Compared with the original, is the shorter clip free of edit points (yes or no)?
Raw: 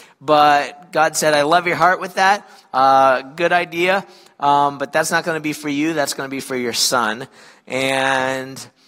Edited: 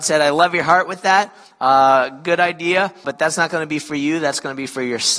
no